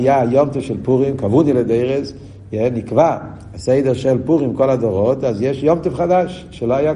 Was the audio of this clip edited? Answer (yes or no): no